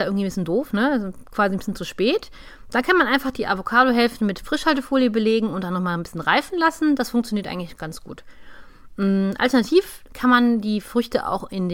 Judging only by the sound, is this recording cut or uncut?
uncut